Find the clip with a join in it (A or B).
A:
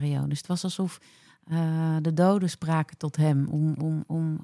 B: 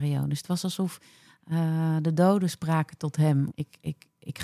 B